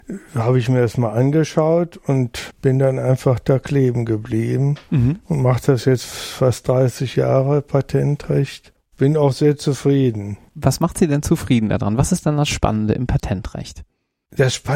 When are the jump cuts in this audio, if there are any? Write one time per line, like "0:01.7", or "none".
none